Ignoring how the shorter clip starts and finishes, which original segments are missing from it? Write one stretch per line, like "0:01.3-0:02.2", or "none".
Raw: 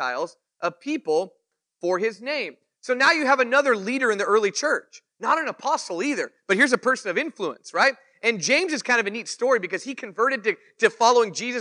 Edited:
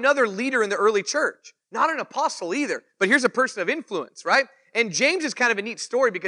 none